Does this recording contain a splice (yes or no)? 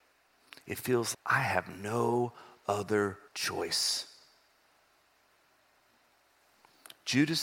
yes